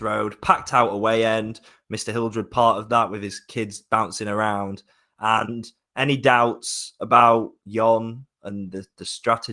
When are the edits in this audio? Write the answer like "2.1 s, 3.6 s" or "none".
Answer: none

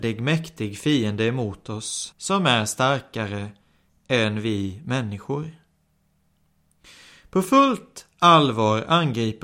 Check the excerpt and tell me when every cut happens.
2.1 s

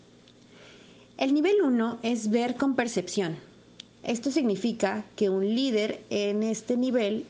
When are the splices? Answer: 4.0 s

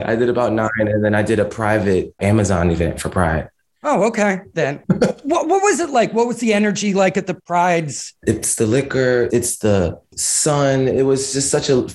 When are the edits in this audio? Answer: 4.5 s, 8.2 s, 9.3 s

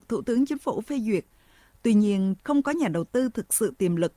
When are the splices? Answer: 2.4 s

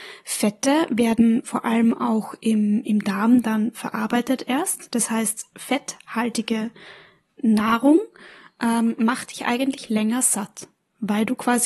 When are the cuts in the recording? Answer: none

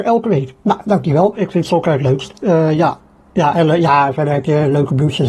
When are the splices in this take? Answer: 1.3 s

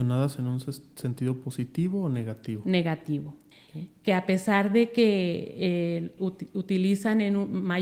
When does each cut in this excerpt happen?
3.5 s, 6.2 s

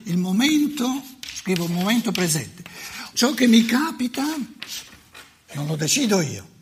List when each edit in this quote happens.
3.1 s

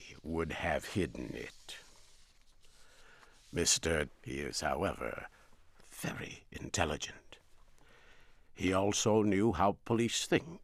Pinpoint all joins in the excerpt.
4.0 s, 8.4 s

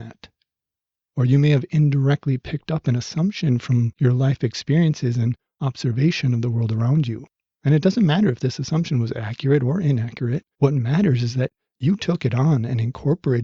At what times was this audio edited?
10.5 s

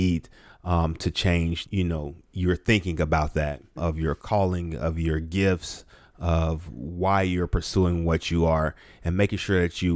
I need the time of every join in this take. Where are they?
1.6 s, 3.8 s

